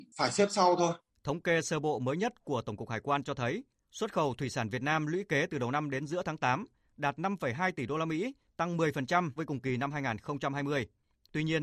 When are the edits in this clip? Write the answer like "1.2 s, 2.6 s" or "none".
1.1 s, 9.4 s